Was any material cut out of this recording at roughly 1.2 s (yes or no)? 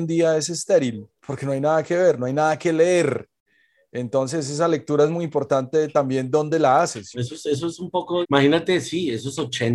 yes